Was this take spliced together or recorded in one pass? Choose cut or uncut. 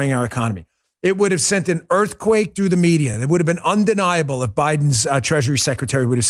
uncut